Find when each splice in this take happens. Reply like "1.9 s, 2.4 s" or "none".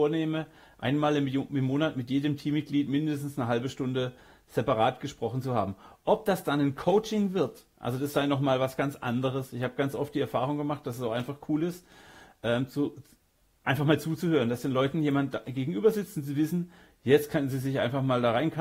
none